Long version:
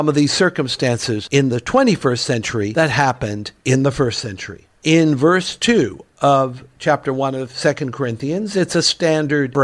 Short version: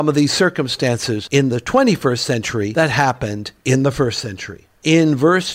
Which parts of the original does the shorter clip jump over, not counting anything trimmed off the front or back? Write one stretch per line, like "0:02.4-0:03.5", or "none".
none